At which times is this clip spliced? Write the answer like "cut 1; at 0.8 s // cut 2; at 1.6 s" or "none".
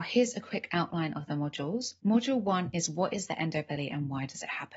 cut 1; at 2.0 s